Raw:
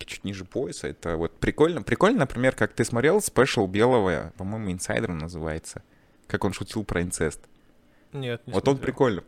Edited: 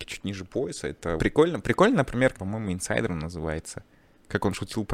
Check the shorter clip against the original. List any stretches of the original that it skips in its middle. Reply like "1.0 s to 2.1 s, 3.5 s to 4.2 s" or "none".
1.2 s to 1.4 s, 2.5 s to 4.3 s